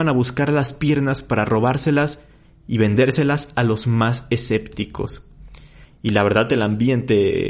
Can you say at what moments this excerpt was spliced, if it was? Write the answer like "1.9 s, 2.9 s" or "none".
5.9 s